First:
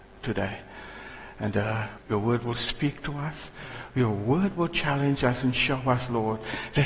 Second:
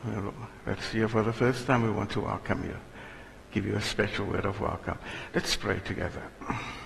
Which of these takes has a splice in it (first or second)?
first